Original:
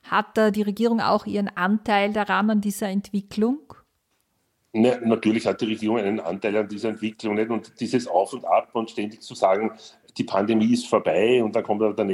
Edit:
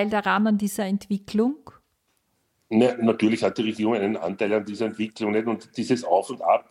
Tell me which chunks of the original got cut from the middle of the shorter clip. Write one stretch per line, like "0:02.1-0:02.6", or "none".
none